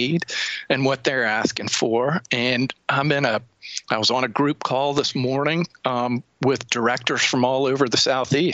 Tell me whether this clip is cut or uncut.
uncut